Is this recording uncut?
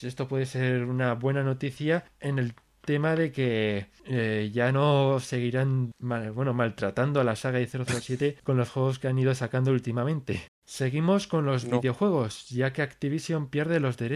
no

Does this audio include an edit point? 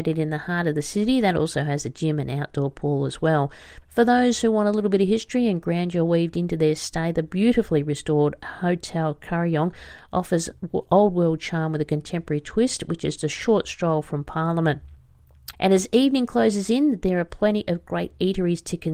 yes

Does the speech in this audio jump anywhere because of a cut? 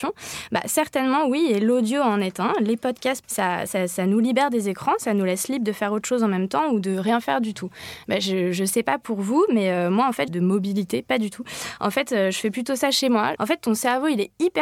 yes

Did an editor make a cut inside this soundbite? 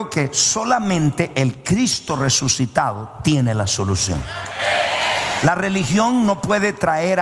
no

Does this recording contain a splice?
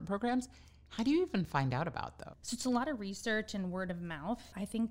no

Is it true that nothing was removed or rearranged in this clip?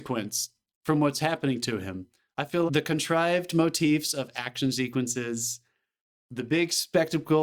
no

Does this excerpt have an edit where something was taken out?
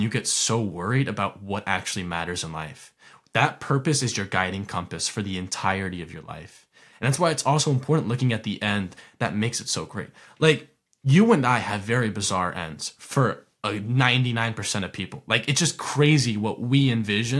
no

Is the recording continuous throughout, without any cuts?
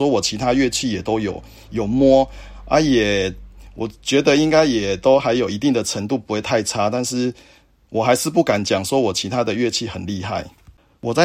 yes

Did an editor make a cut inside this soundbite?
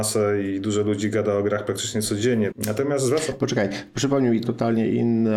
yes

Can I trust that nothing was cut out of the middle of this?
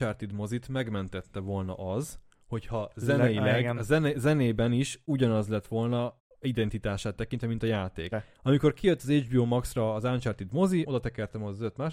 no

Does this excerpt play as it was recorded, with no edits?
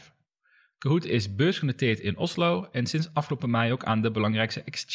yes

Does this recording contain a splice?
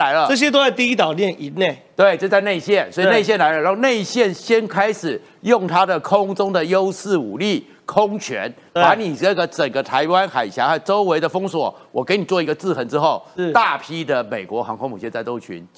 no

